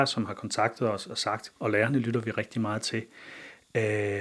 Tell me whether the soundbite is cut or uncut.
cut